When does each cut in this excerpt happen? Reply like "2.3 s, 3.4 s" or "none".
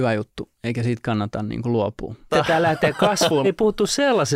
2.3 s, 3.4 s